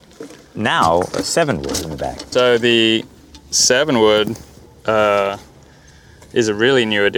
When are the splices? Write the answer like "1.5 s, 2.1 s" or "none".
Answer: 2.3 s